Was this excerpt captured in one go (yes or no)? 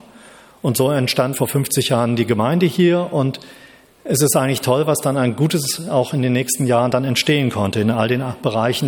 no